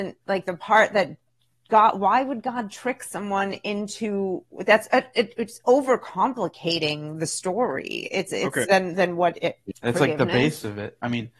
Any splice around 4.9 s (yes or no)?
no